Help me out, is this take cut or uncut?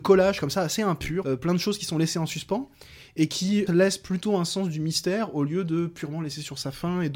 cut